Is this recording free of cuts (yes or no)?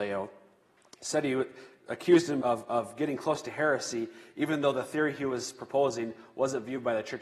no